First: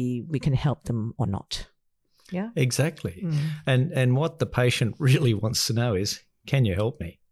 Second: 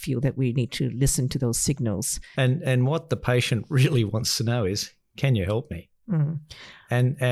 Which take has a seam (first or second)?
second